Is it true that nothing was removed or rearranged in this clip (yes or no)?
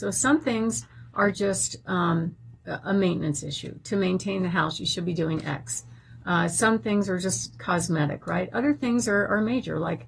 yes